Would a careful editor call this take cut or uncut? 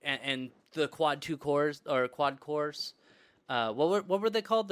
uncut